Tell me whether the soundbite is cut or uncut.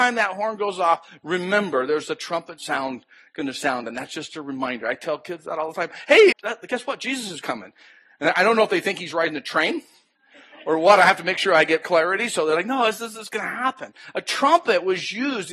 cut